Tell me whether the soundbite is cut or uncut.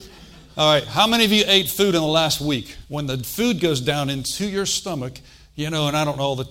cut